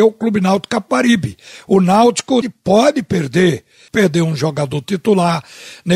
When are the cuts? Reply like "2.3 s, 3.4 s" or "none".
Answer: 2.4 s, 3.9 s